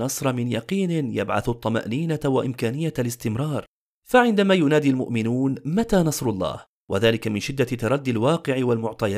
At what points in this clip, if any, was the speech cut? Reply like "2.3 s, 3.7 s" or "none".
none